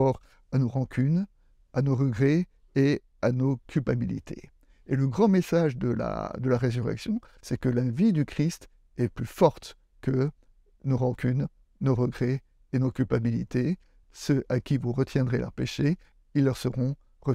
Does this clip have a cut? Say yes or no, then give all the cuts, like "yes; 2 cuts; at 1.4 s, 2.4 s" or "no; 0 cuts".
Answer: yes; 1 cut; at 14.0 s